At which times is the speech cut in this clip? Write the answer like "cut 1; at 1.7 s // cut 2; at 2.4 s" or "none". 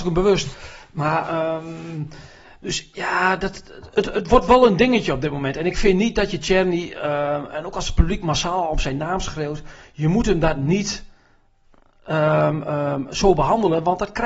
none